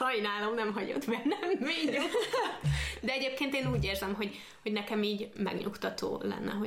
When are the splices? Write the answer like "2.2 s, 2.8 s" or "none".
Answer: none